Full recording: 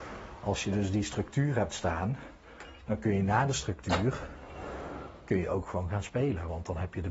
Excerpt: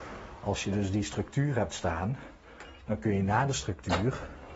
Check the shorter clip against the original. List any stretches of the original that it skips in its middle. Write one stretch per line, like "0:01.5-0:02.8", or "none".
none